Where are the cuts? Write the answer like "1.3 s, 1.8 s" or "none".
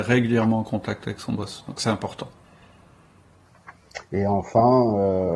none